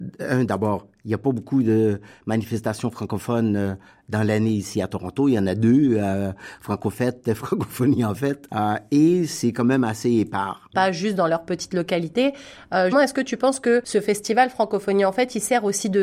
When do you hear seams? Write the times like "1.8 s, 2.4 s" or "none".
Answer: 10.7 s, 12.9 s